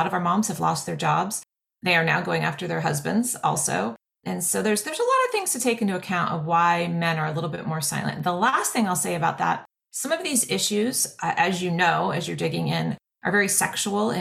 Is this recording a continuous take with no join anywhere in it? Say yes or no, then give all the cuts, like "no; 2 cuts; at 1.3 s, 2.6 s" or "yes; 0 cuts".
yes; 0 cuts